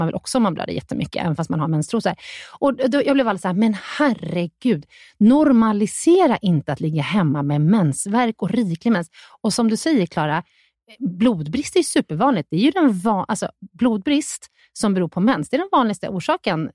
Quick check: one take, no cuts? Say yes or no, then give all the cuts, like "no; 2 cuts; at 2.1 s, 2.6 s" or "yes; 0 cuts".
yes; 0 cuts